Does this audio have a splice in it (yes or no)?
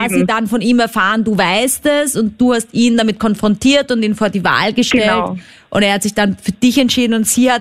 no